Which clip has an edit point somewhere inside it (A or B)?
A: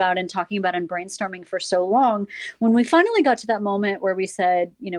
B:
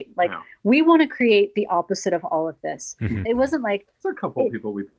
B